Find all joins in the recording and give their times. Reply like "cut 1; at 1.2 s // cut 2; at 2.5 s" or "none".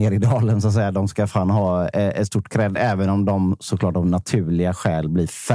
none